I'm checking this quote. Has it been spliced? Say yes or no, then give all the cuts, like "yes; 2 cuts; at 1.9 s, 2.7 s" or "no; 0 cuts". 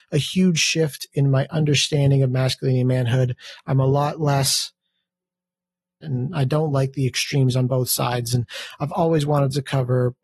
yes; 1 cut; at 6.0 s